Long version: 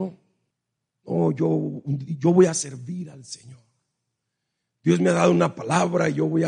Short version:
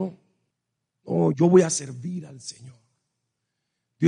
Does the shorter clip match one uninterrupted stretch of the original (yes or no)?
no